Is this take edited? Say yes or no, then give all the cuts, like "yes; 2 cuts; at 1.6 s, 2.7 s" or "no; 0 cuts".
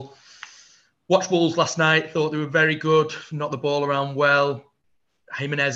no; 0 cuts